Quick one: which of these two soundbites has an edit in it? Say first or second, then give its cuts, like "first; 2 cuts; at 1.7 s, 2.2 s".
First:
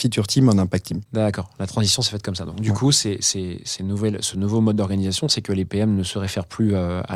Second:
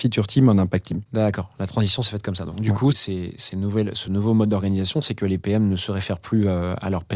second; 1 cut; at 2.9 s